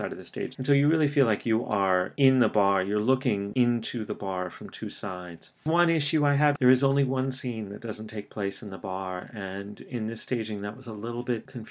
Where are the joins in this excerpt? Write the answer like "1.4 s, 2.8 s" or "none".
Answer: 6.6 s